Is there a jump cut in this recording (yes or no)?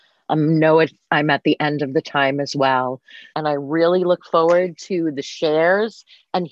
yes